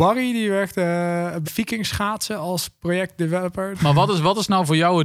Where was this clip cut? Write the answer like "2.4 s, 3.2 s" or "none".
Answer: 1.4 s, 3.7 s